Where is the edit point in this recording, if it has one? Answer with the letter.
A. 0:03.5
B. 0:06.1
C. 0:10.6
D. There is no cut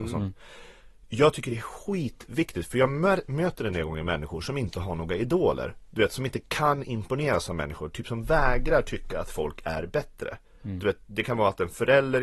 D